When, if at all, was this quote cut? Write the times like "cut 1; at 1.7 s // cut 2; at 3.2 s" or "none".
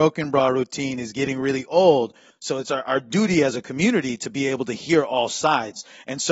cut 1; at 2.3 s